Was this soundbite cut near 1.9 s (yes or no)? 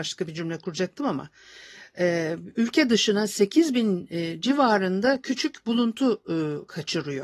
no